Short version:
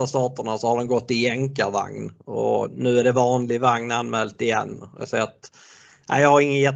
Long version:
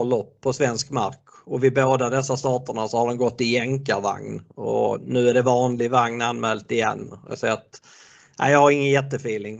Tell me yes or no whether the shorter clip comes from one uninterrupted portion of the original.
yes